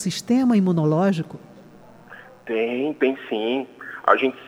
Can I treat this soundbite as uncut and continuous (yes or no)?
yes